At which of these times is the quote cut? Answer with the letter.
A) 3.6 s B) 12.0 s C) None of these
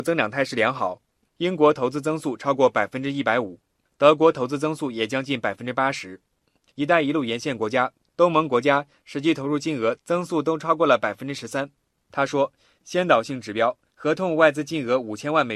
B